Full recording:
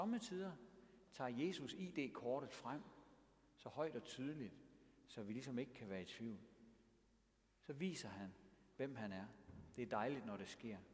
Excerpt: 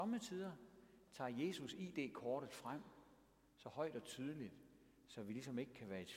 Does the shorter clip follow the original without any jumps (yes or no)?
yes